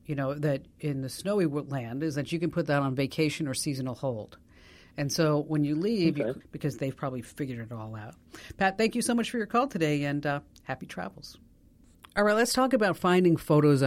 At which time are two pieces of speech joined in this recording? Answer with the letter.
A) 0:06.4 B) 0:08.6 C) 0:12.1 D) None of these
A